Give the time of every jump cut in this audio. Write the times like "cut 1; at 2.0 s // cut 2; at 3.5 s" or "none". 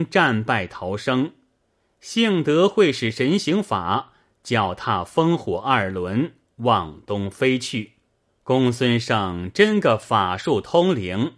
cut 1; at 8.3 s

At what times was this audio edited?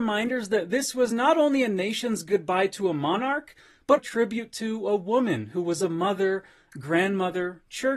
cut 1; at 4.0 s

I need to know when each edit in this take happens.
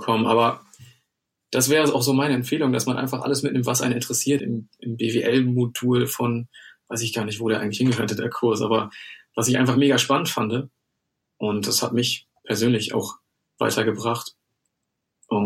cut 1; at 4.4 s

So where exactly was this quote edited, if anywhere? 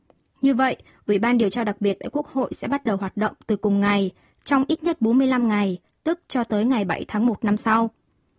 none

